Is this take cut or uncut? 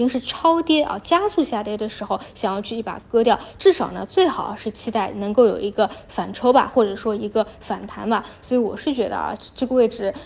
uncut